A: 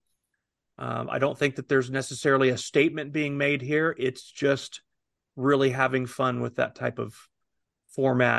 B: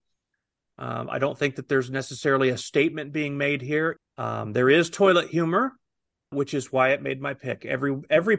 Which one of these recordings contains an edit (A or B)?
B